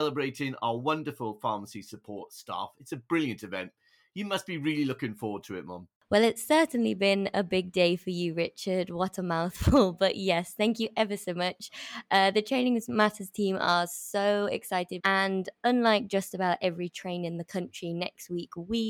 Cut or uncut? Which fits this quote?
cut